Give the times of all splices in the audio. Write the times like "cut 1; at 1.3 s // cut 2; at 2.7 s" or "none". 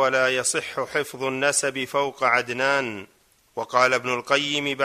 none